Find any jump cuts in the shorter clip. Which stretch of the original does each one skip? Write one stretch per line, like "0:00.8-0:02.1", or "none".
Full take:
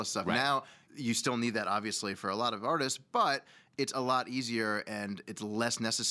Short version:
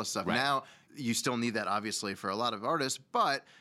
none